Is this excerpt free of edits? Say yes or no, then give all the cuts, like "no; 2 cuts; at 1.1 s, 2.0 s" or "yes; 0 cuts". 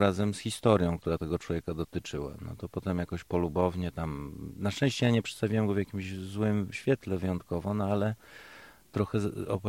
yes; 0 cuts